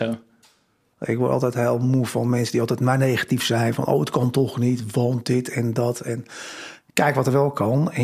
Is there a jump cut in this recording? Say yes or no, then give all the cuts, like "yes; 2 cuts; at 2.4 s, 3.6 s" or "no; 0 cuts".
yes; 1 cut; at 0.9 s